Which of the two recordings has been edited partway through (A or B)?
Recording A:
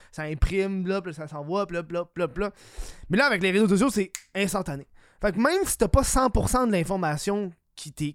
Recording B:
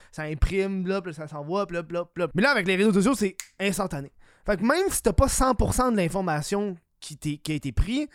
B